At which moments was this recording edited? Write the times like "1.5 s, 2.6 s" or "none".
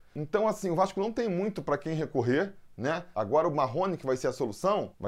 3.1 s